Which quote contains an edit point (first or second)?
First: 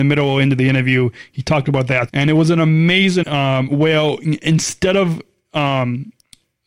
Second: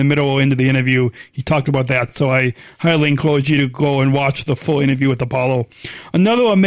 first